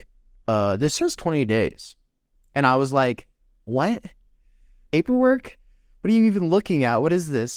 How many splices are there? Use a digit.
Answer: 0